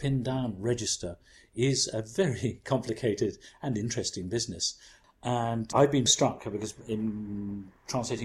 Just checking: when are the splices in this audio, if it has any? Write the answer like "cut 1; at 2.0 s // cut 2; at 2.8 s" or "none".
cut 1; at 6.1 s